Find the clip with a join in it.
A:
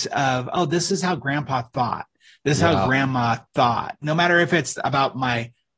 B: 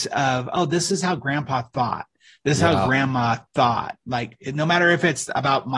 A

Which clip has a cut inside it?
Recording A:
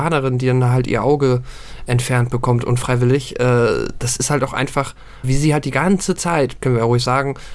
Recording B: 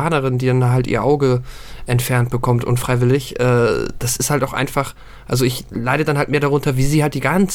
A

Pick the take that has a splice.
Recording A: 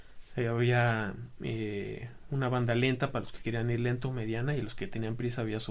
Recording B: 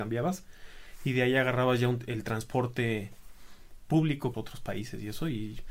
B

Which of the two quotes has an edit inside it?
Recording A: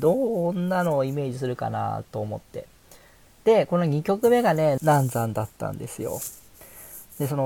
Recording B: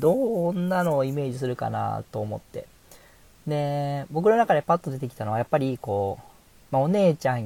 A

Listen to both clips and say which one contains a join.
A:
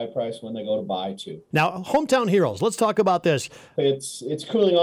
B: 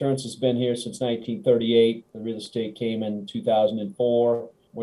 A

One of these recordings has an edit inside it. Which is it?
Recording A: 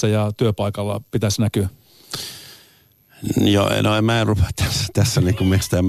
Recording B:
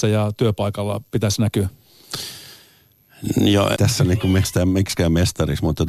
B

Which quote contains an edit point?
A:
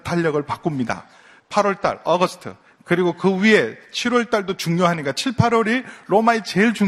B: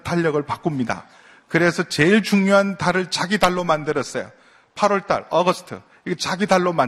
A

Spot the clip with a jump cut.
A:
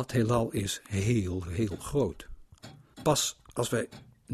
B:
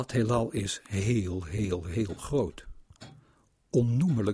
A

